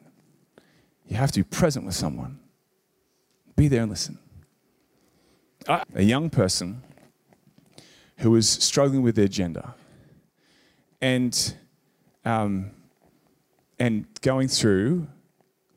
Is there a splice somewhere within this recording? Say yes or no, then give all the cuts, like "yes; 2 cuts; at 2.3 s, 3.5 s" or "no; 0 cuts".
yes; 1 cut; at 5.8 s